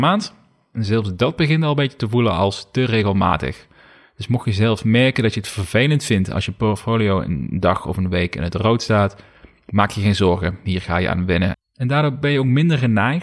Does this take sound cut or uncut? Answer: cut